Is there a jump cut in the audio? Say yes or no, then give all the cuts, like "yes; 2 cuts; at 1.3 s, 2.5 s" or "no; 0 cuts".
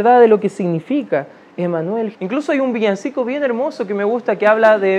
yes; 1 cut; at 2.1 s